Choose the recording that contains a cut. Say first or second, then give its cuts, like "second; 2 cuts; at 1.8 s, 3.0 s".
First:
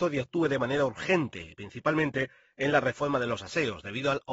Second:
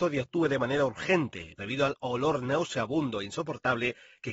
second; 1 cut; at 1.6 s